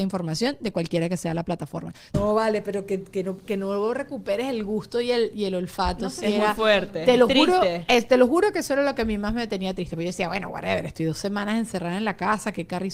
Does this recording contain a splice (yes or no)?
yes